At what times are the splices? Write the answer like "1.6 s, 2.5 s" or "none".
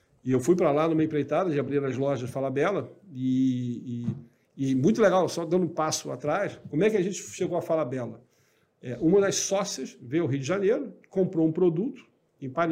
none